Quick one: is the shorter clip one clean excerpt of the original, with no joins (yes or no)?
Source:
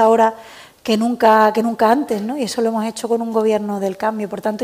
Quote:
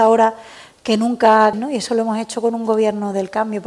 no